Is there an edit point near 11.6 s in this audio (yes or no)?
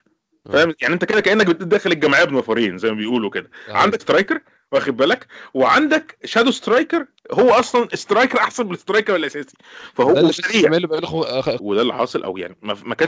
yes